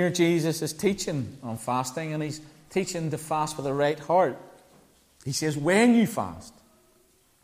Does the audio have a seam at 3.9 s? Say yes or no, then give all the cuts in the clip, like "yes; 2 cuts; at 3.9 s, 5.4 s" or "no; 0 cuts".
no; 1 cut; at 5.2 s